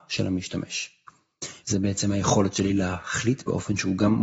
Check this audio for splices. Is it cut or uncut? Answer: cut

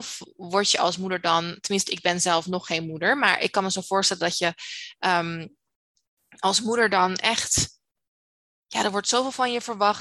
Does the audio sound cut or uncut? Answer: uncut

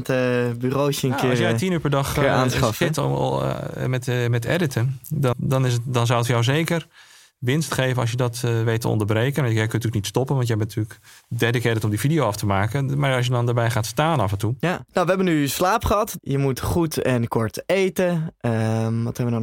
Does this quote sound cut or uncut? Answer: cut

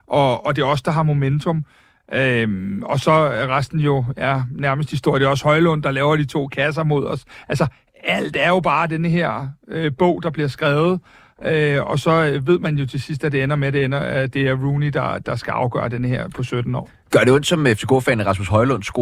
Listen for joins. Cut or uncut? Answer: uncut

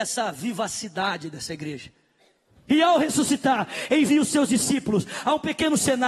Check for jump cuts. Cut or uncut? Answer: cut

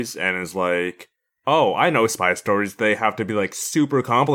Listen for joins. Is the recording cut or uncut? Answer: uncut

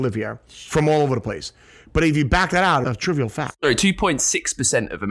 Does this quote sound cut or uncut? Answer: cut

